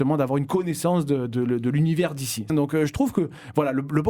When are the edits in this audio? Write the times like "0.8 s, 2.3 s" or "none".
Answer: 2.5 s